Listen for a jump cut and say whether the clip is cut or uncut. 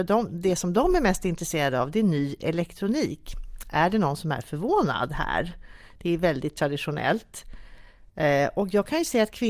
uncut